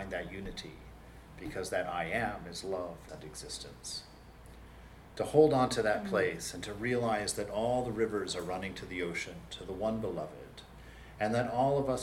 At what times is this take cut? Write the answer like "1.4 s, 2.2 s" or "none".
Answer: 3.1 s